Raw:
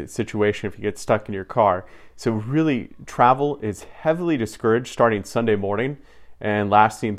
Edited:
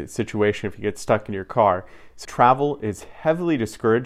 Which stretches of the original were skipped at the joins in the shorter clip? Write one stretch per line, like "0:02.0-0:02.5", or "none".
0:02.2-0:03.0

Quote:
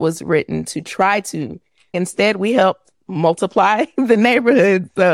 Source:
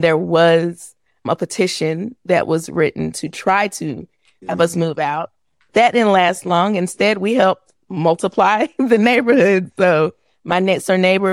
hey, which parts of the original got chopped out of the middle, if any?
0:04.4-0:06.8

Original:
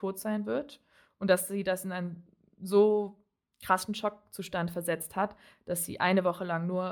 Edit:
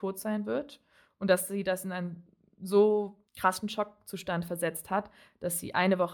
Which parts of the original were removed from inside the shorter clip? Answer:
0:03.3-0:03.5

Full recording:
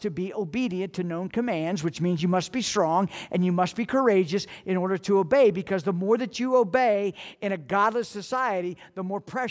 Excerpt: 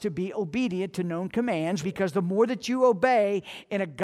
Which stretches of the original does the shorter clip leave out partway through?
0:01.8-0:05.5

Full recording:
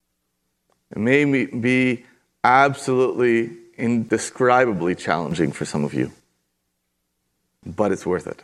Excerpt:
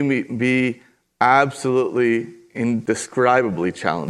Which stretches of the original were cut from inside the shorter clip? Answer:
none

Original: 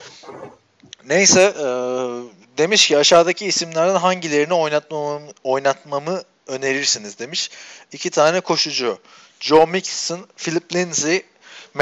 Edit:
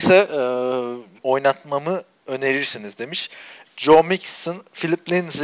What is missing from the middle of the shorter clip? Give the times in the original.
0:02.4-0:05.4
0:07.8-0:09.3

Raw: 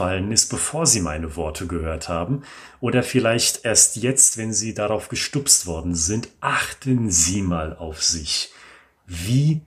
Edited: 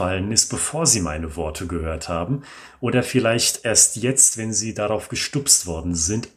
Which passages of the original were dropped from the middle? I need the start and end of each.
none

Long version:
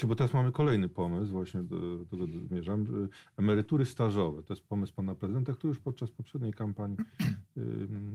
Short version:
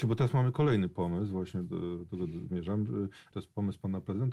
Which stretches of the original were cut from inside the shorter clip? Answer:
0:03.3-0:04.4

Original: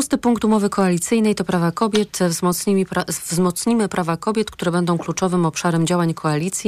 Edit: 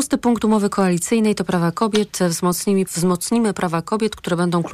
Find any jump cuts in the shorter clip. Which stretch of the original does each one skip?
0:02.9-0:03.2

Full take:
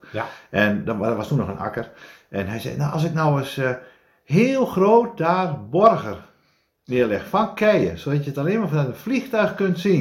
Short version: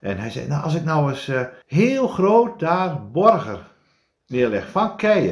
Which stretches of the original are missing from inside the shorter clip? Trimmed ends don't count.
0:03.9-0:04.2

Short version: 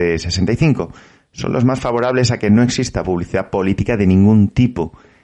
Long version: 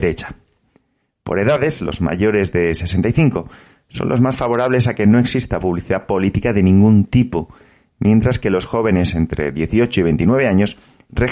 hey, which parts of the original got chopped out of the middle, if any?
none

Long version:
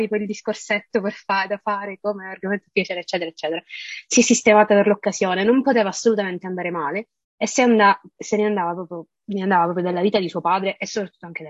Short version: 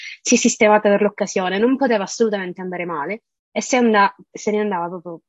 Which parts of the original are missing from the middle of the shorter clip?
none

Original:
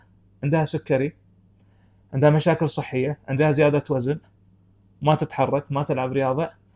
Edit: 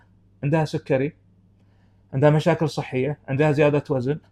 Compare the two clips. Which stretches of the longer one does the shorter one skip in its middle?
none

